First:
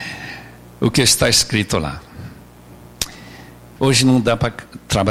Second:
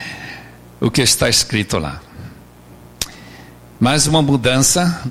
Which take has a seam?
first; 1 cut; at 3.8 s

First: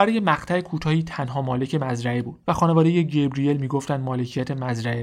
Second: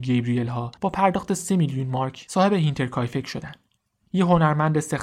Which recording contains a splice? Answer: second; 1 cut; at 4.0 s

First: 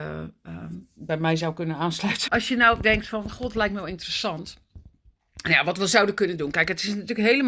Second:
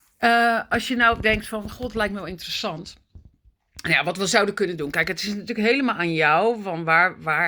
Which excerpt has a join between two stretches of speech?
first; 1 cut; at 2.3 s

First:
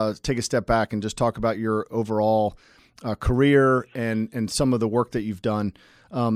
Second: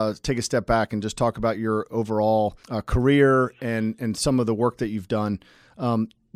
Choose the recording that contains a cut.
second; 1 cut; at 2.6 s

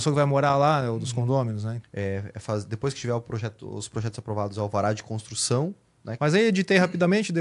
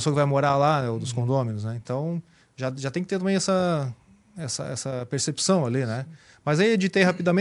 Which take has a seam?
first; 2 cuts; at 1.8 s, 6.2 s

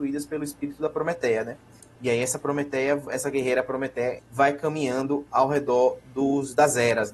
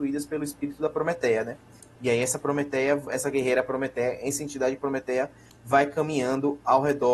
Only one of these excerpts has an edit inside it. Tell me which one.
first; 1 cut; at 4.2 s

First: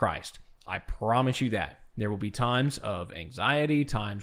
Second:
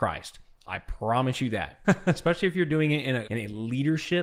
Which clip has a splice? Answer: second; 2 cuts; at 1.8 s, 3.3 s

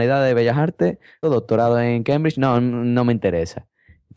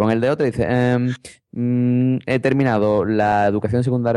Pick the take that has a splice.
first; 1 cut; at 1.2 s

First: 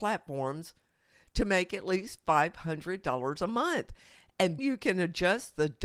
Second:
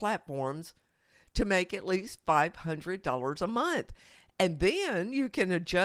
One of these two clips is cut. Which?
first; 1 cut; at 4.6 s

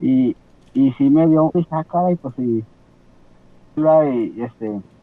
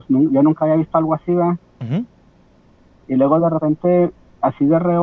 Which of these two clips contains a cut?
first; 2 cuts; at 1.5 s, 3.8 s

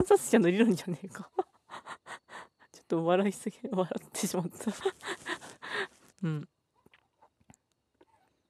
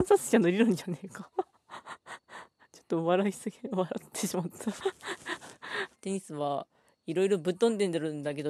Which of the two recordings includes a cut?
second; 1 cut; at 5.9 s

